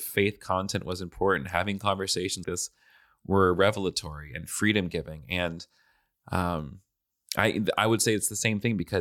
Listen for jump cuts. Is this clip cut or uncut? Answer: cut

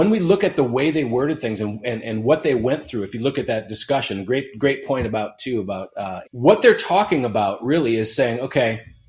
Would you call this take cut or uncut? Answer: cut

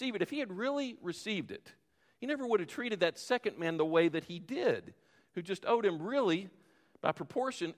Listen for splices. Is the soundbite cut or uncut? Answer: uncut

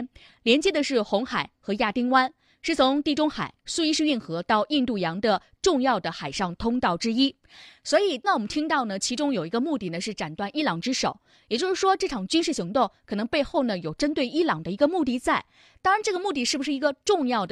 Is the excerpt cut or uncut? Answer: cut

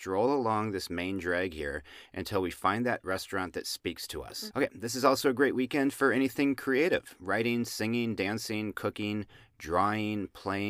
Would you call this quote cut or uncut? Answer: cut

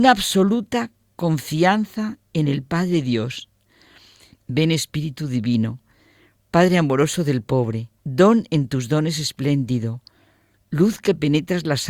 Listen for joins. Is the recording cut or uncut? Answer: cut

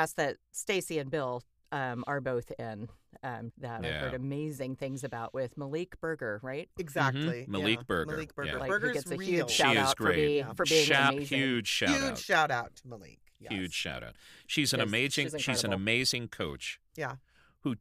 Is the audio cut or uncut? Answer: cut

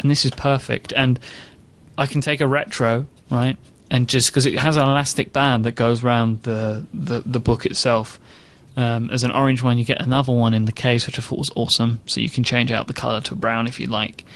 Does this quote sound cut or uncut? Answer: uncut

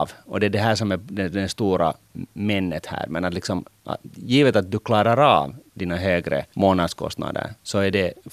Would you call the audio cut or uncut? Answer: uncut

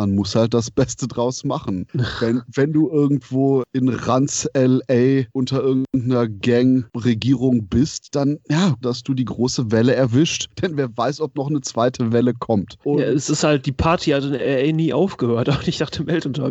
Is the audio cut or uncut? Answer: cut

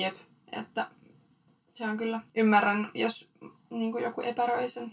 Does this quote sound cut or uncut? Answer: uncut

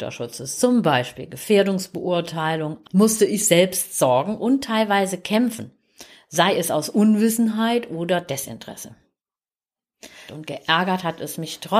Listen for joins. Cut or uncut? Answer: cut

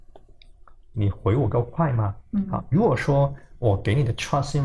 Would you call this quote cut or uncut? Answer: cut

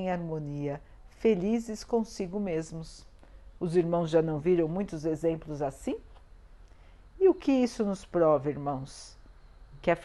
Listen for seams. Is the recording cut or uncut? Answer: uncut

